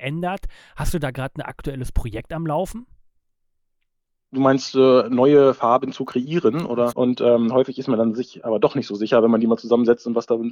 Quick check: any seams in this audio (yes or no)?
yes